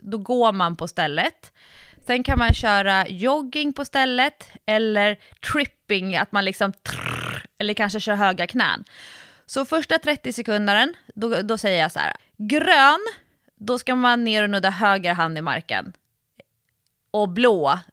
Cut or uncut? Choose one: cut